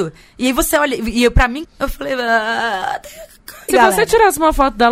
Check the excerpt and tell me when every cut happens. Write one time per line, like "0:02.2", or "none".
0:01.6
0:03.7